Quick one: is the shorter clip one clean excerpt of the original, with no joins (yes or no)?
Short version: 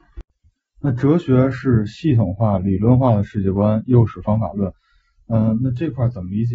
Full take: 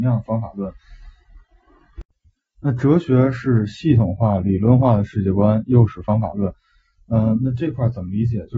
yes